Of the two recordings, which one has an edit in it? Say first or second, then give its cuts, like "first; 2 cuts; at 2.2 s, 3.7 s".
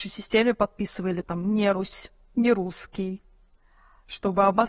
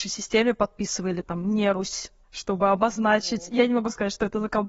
second; 1 cut; at 2.2 s